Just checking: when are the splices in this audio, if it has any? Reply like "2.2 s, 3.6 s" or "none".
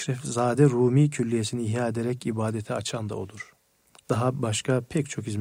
none